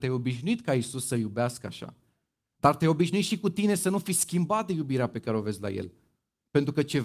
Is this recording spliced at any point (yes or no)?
no